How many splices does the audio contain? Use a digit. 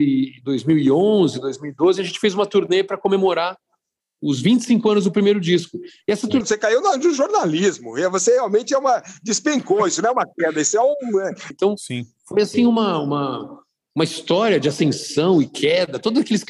2